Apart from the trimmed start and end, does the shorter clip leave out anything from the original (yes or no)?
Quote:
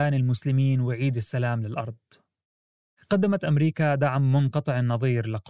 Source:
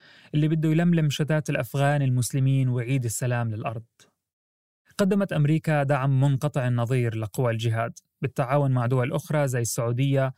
no